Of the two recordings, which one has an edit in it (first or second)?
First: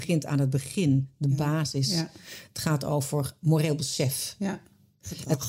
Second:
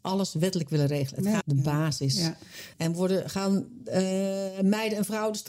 second